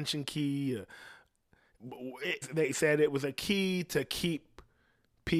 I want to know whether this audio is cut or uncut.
cut